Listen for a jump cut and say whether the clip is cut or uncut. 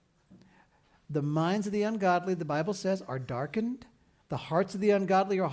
uncut